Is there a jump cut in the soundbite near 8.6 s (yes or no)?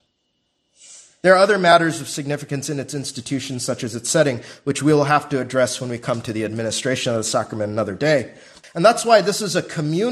yes